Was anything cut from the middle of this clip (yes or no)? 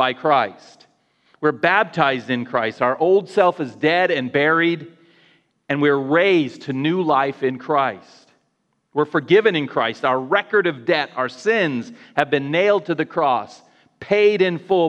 no